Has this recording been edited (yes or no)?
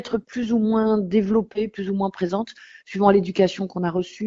no